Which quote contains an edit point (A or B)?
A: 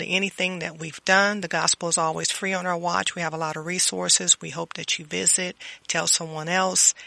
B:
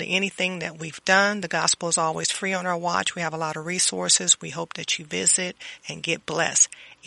B